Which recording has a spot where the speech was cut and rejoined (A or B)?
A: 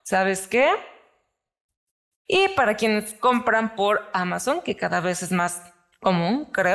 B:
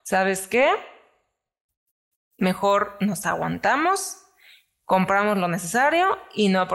A